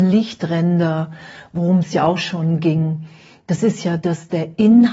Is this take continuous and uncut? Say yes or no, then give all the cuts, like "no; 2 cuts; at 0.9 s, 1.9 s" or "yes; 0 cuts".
yes; 0 cuts